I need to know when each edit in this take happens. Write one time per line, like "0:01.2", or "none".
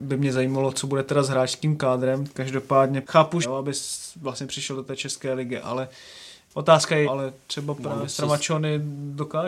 0:03.4
0:07.0